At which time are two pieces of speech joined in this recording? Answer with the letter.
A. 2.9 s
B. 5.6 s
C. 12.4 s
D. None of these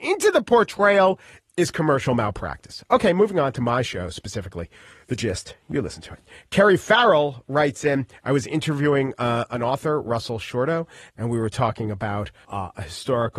C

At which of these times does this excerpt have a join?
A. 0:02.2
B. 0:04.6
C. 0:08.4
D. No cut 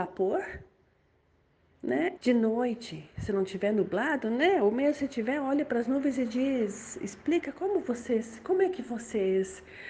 A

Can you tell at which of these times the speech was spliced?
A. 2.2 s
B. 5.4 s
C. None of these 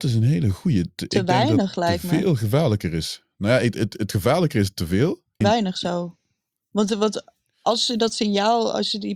B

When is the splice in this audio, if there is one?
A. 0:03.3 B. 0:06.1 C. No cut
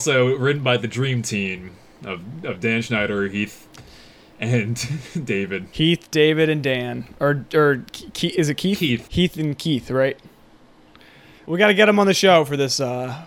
C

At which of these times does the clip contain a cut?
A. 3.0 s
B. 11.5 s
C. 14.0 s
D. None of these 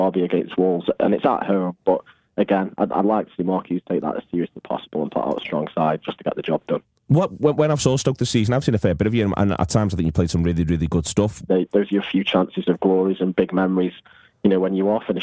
B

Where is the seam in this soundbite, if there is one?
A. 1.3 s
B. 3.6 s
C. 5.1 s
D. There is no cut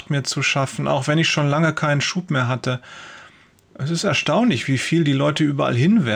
B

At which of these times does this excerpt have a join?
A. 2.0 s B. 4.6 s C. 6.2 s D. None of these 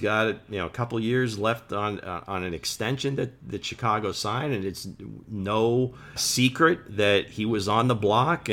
C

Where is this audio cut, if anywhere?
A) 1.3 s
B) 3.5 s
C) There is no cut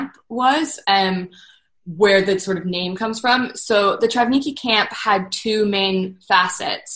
C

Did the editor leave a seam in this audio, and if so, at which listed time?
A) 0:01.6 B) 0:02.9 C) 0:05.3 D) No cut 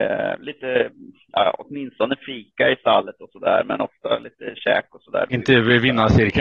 C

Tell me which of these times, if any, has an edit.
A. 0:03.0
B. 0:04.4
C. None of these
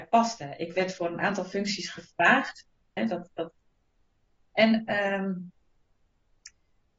A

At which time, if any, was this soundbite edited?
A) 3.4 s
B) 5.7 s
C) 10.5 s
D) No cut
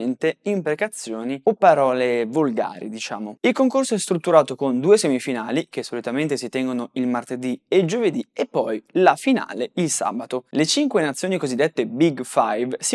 A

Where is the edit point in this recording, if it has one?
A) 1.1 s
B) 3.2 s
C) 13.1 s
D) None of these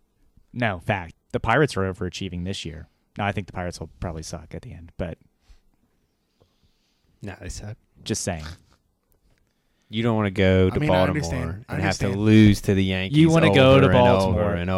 A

